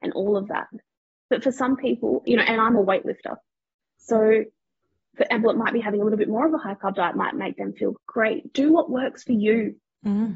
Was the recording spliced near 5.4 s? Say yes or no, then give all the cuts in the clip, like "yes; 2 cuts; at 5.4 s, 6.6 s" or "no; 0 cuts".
yes; 2 cuts; at 5.4 s, 7.9 s